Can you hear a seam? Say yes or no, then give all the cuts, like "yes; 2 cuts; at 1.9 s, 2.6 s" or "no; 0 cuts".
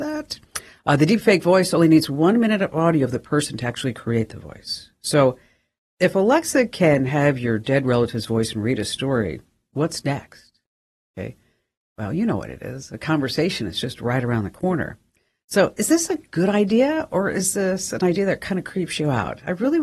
no; 0 cuts